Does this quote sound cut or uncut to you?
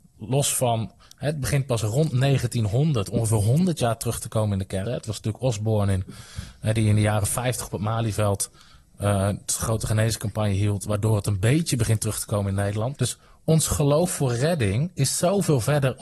cut